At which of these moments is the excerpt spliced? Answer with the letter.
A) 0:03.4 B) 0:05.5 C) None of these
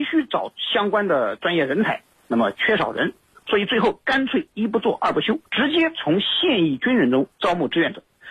B